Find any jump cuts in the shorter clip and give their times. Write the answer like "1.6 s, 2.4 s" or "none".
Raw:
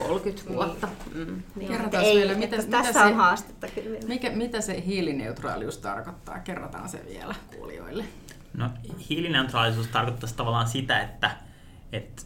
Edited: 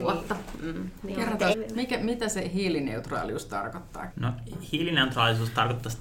1.5 s, 4.1 s